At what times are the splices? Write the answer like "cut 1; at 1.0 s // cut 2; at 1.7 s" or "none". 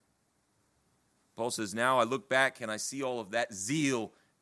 none